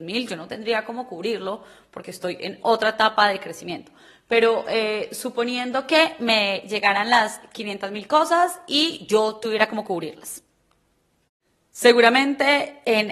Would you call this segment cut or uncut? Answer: uncut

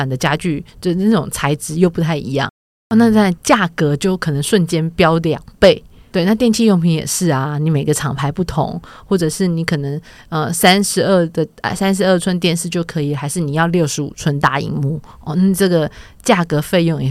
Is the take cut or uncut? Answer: uncut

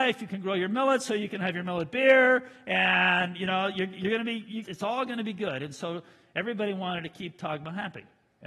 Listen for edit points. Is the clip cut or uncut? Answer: cut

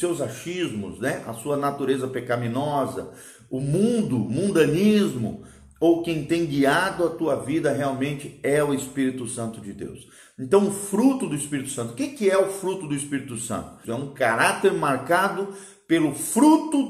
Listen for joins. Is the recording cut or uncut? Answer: cut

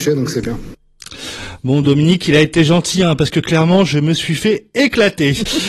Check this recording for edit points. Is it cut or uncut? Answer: uncut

